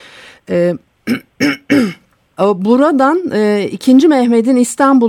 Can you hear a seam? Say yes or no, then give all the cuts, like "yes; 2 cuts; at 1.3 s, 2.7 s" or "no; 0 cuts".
yes; 1 cut; at 2.4 s